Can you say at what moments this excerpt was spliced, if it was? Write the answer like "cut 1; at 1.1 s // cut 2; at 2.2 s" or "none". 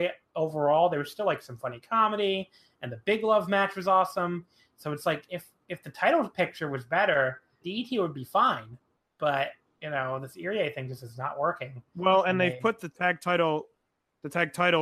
cut 1; at 7.6 s